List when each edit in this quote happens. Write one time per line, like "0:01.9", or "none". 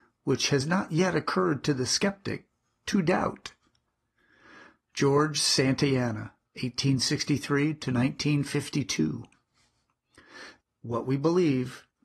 0:10.6